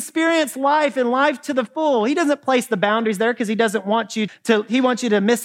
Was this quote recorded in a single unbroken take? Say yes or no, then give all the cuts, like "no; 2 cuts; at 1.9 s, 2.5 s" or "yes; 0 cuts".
no; 1 cut; at 4.3 s